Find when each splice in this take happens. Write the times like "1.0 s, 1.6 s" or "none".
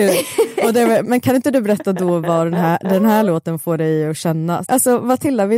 1.0 s, 4.6 s